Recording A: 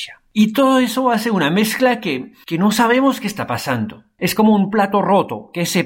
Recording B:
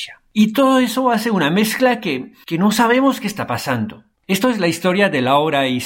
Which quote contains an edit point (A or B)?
B